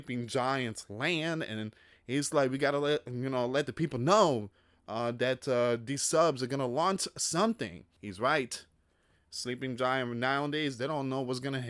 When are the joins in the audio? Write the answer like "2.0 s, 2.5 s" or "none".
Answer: 8.0 s